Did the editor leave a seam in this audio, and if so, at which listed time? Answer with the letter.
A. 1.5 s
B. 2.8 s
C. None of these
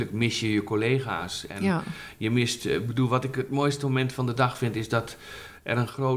C